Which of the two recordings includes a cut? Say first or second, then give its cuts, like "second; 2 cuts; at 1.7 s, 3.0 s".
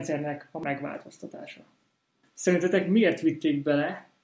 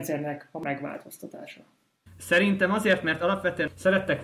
second; 1 cut; at 2.1 s